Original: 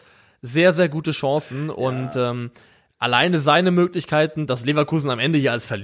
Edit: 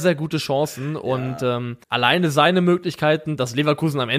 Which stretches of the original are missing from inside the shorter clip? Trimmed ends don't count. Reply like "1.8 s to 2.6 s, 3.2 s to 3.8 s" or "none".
2.6 s to 2.9 s